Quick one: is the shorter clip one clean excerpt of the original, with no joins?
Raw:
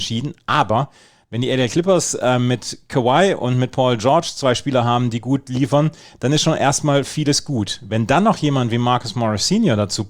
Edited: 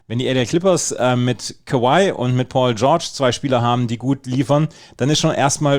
yes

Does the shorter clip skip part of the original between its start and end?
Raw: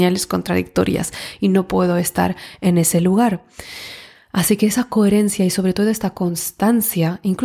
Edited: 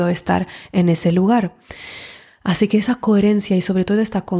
no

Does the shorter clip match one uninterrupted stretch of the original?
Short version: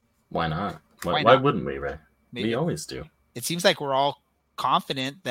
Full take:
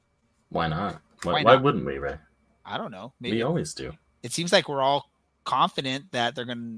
no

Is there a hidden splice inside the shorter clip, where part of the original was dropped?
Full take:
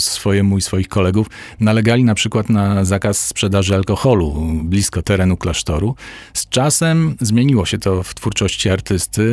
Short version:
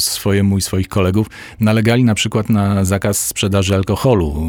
no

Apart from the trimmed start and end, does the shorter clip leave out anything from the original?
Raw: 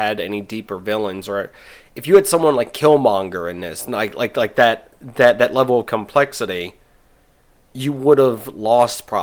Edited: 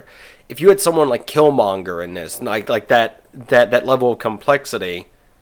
yes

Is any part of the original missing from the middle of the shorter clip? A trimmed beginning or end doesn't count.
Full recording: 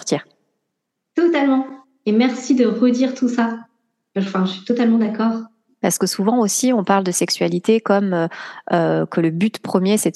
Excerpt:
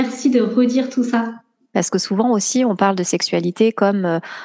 yes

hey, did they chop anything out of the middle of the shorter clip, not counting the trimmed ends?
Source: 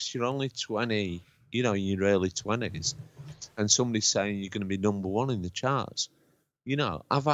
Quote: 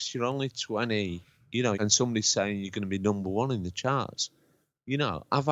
yes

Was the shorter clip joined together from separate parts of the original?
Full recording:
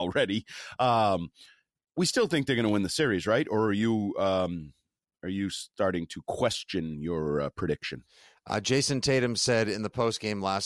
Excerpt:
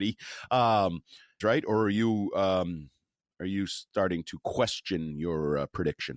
yes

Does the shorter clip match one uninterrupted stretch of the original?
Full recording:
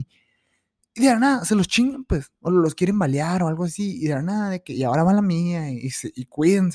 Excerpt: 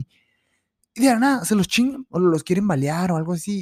no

